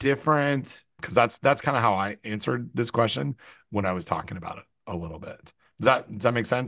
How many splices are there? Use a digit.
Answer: 1